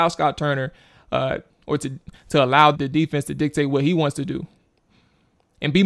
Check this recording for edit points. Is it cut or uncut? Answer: cut